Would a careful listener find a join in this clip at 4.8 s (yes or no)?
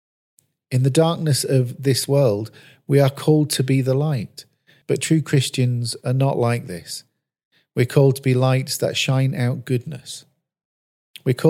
yes